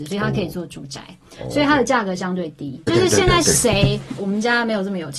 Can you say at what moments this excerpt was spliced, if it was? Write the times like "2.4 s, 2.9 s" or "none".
2.9 s, 4.2 s